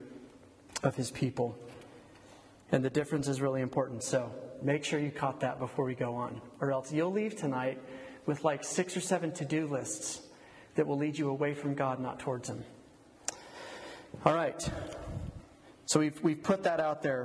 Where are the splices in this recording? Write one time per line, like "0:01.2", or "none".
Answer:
none